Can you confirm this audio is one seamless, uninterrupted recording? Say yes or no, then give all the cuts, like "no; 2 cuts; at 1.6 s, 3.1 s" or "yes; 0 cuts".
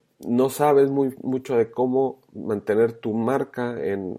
yes; 0 cuts